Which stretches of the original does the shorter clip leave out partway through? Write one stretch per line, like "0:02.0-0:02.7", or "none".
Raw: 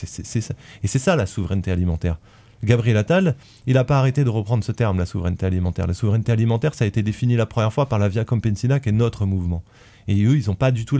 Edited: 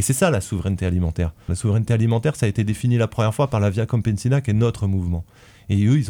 0:02.3-0:05.9